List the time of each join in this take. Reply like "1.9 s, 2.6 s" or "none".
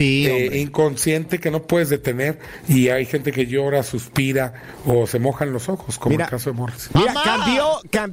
6.9 s